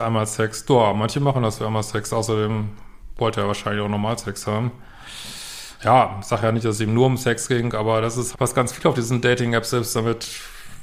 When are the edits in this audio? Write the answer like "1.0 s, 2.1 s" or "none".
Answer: 5.8 s, 8.3 s